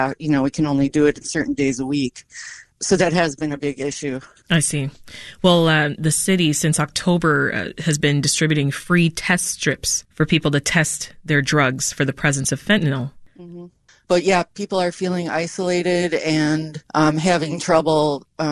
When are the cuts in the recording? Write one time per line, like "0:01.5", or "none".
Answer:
0:13.9
0:16.9